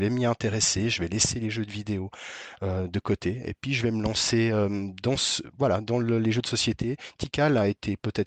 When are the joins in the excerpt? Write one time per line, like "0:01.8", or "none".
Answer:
none